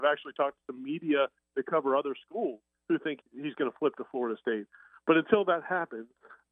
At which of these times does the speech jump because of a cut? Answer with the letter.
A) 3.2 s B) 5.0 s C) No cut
A